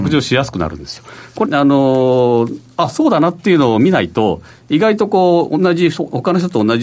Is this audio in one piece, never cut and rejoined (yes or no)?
no